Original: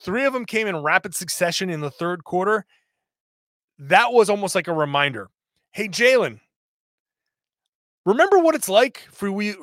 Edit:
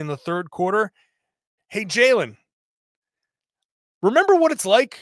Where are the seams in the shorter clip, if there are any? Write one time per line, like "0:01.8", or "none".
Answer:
0:01.6